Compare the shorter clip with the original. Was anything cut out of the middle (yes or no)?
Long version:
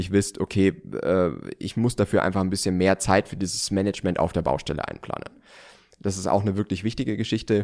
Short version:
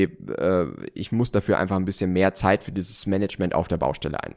no